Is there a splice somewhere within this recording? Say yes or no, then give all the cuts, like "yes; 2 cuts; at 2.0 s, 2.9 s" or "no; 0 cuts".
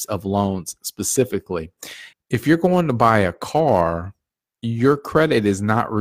yes; 1 cut; at 2.1 s